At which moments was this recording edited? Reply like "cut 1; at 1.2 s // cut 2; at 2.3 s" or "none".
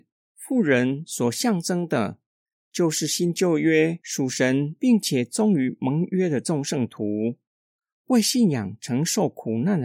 none